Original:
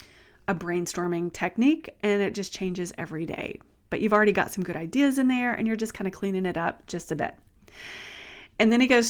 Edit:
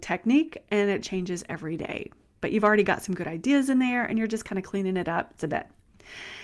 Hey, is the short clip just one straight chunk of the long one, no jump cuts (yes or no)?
no